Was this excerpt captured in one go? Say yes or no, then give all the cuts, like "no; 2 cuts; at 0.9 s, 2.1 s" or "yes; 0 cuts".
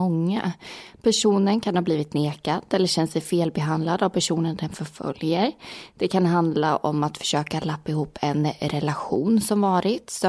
yes; 0 cuts